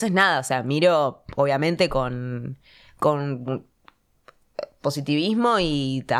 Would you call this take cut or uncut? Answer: uncut